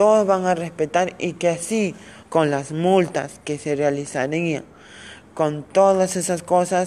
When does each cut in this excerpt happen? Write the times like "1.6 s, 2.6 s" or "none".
2.2 s